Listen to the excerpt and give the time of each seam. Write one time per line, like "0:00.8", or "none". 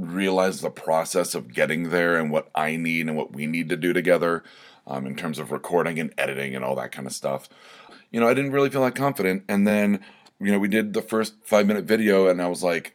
none